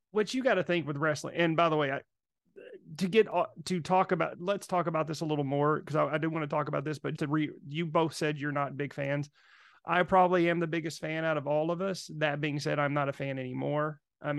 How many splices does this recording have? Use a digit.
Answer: 1